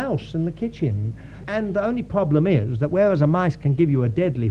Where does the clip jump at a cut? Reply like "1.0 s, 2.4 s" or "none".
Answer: 1.4 s